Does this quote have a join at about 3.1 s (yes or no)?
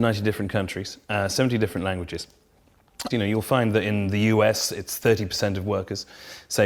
yes